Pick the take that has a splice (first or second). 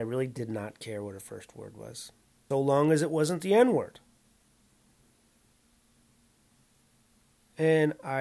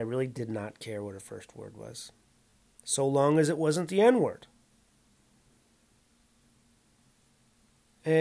first